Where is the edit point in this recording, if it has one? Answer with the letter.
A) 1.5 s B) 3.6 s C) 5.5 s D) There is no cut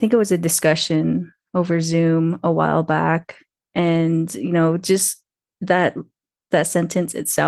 B